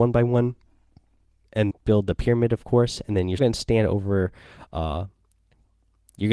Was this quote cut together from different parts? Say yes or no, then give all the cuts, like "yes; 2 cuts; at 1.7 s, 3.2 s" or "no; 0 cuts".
yes; 2 cuts; at 1.7 s, 3.4 s